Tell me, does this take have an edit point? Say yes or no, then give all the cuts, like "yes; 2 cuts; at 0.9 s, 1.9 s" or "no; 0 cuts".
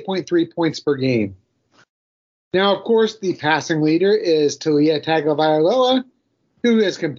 no; 0 cuts